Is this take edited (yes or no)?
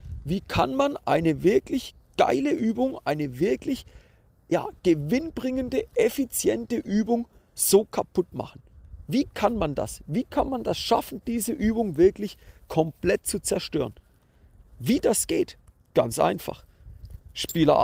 no